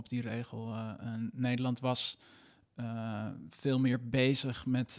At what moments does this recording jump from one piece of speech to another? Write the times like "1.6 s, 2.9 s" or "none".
none